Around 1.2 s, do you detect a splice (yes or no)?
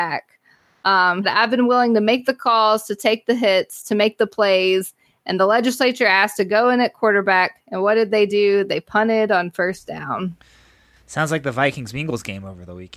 yes